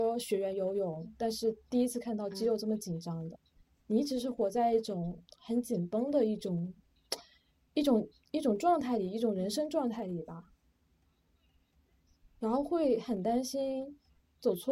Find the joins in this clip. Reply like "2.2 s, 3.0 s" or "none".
3.4 s